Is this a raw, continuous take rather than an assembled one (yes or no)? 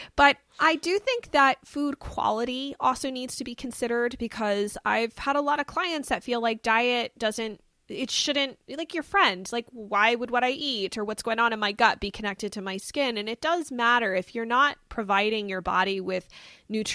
yes